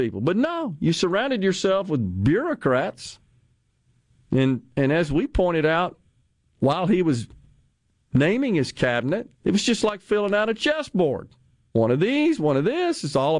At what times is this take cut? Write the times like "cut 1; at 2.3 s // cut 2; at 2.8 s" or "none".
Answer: cut 1; at 9.3 s // cut 2; at 12.4 s